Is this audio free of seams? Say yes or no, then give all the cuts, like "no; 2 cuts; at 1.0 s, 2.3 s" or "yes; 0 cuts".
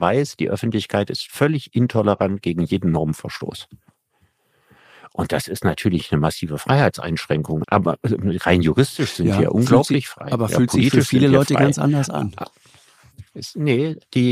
no; 1 cut; at 7.6 s